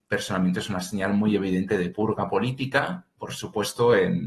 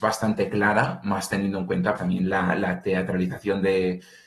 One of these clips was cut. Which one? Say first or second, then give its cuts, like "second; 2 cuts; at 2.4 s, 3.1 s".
second; 1 cut; at 2.0 s